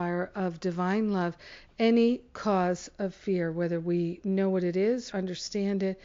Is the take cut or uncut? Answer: cut